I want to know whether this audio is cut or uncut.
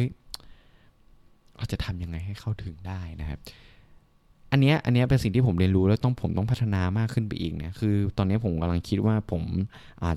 uncut